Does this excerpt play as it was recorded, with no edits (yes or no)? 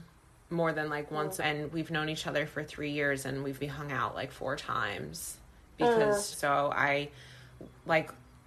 no